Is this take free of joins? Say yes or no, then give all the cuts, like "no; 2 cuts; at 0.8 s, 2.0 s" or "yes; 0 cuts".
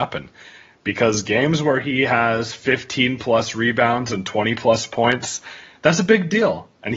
yes; 0 cuts